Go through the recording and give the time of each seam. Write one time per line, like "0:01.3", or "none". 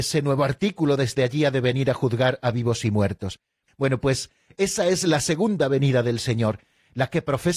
0:03.7